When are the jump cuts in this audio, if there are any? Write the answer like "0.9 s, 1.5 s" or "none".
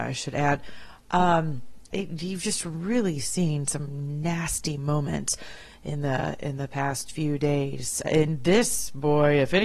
1.9 s, 8.0 s